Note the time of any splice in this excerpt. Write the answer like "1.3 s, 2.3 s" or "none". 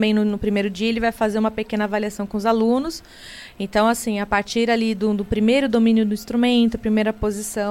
none